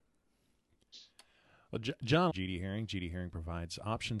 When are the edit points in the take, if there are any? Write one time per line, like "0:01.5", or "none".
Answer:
0:02.3